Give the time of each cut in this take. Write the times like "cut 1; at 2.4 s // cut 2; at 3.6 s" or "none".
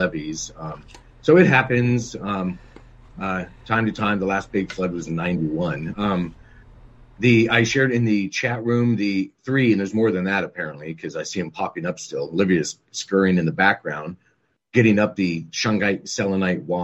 cut 1; at 5.9 s